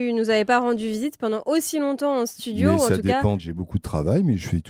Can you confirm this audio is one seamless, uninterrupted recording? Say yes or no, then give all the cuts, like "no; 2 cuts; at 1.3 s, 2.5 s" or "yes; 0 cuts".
no; 1 cut; at 3.4 s